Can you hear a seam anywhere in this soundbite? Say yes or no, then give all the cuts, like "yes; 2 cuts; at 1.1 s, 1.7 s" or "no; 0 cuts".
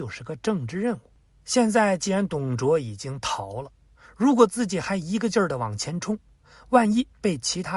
no; 0 cuts